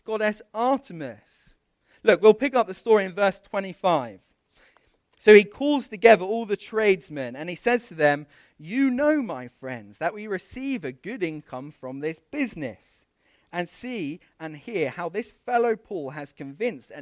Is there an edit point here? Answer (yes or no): no